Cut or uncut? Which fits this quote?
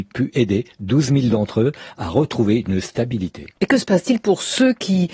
cut